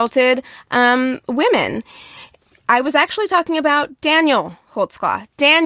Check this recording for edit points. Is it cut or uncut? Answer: uncut